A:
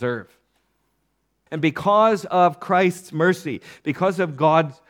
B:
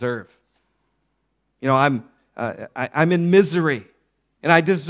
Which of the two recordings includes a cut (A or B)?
A